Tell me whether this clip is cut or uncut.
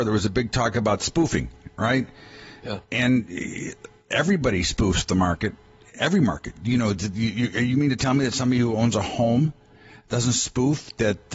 uncut